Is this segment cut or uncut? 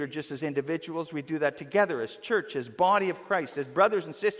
uncut